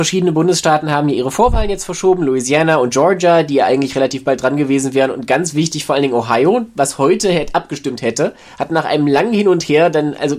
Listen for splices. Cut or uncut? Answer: uncut